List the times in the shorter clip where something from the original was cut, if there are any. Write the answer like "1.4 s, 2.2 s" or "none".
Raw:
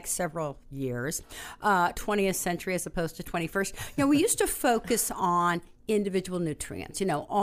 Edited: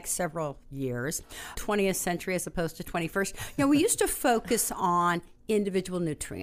1.5 s